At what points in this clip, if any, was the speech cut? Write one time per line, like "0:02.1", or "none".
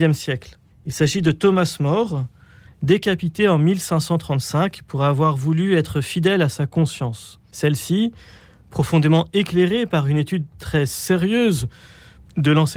0:02.7